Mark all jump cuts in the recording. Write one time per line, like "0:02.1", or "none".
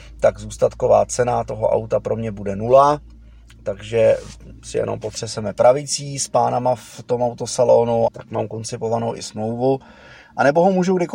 0:08.1